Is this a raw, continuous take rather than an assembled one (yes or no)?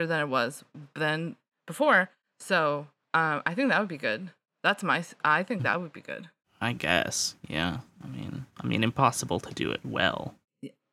no